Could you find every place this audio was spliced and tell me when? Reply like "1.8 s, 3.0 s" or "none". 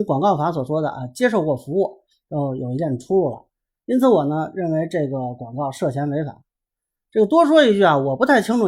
none